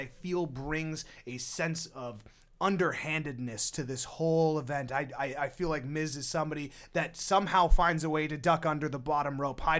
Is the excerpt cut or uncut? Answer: uncut